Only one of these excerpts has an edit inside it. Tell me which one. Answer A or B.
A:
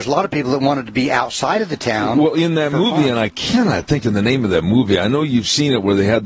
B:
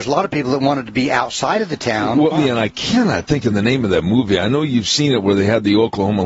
B